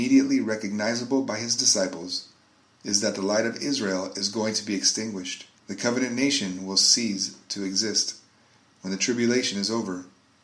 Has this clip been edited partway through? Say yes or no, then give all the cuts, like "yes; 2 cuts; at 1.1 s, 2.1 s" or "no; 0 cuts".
yes; 1 cut; at 5.6 s